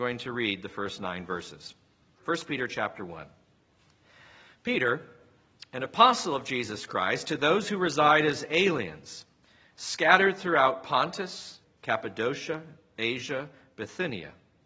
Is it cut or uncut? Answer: cut